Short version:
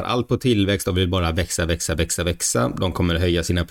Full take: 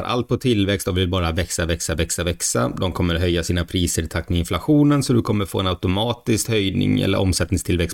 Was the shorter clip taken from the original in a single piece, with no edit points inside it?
yes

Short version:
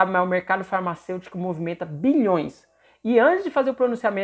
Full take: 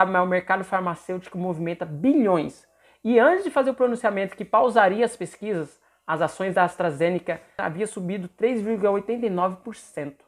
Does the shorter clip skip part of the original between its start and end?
no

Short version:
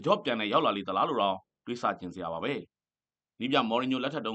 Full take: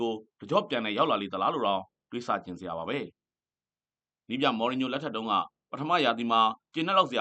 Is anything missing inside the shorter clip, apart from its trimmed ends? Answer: yes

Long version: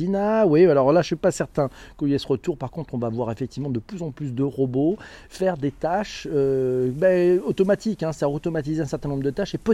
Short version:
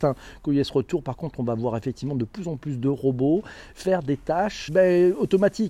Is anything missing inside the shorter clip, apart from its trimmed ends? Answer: yes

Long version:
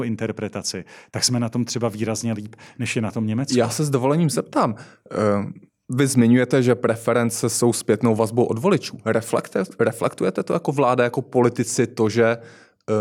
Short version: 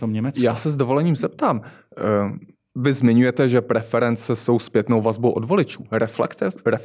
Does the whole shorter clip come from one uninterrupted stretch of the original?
yes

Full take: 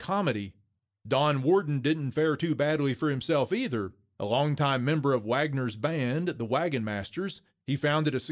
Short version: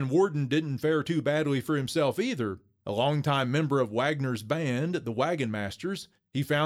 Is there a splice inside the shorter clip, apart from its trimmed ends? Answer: no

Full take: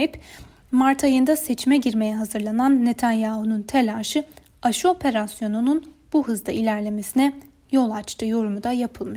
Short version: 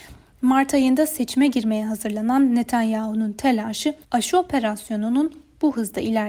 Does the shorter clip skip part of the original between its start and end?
yes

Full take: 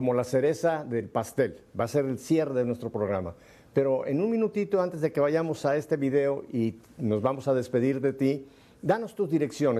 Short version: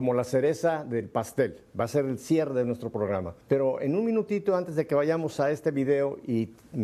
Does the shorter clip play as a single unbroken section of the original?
no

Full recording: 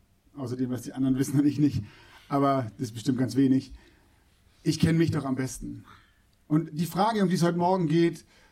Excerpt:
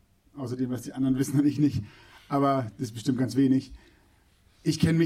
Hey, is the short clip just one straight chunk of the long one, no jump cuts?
yes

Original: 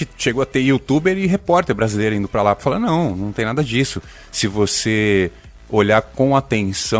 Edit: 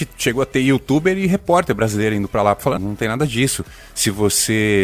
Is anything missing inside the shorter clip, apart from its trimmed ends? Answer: yes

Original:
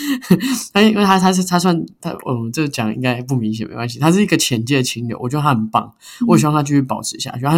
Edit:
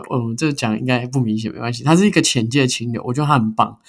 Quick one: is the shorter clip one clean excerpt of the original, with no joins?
yes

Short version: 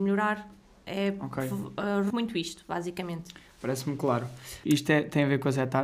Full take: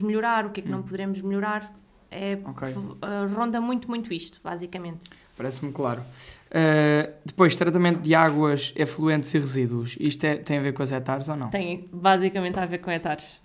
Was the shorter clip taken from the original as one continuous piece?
no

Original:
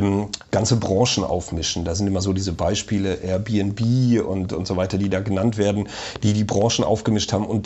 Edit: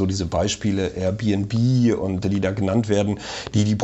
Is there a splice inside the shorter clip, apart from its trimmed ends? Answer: yes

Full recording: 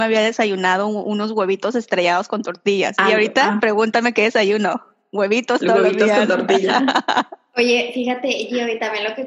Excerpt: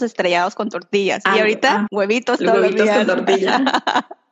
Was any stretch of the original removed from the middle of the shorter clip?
yes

